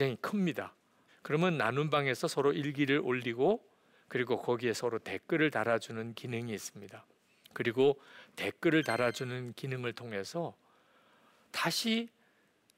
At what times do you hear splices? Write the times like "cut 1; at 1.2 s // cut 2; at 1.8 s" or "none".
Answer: cut 1; at 1.1 s // cut 2; at 7.4 s